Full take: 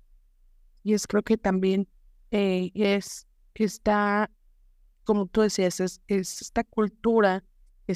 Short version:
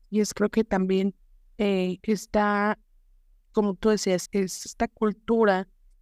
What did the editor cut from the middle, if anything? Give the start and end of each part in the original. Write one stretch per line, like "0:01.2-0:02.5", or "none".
0:02.7-0:03.5
0:05.8-0:06.0